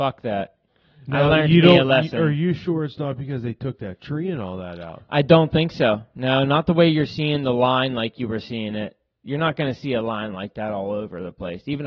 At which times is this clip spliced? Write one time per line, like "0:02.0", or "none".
none